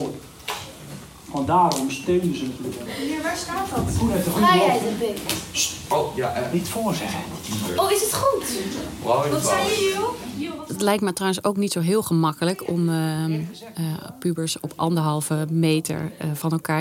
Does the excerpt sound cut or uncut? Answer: uncut